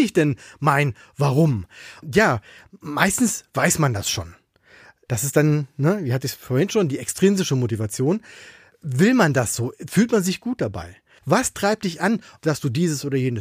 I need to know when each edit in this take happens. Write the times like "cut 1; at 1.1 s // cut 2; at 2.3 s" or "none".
cut 1; at 5.1 s // cut 2; at 11.2 s // cut 3; at 12.4 s